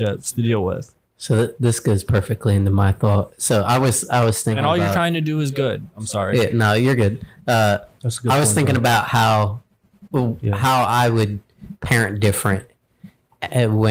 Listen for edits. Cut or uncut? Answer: uncut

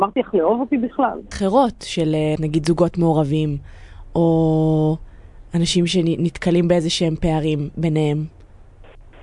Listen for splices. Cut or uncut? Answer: cut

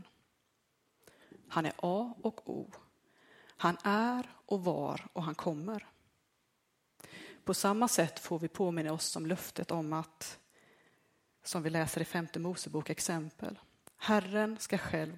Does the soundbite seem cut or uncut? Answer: cut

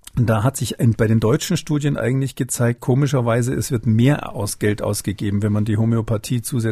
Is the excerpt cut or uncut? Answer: uncut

